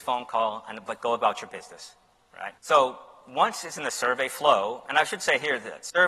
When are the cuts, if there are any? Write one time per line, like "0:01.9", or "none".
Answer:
0:02.6